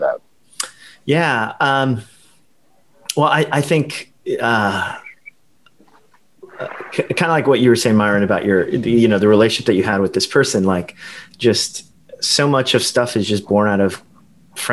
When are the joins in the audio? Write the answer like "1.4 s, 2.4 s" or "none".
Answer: none